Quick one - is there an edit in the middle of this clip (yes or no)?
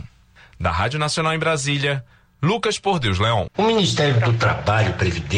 yes